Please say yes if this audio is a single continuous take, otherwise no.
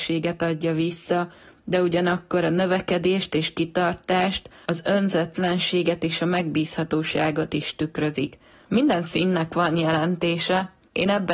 no